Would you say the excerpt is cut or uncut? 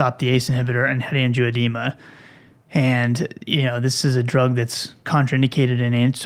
uncut